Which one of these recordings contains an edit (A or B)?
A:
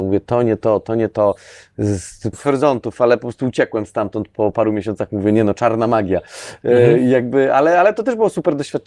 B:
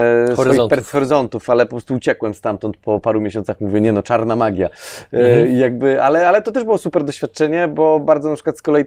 A